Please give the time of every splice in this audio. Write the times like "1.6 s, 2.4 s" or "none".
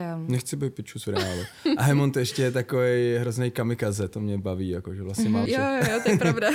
5.5 s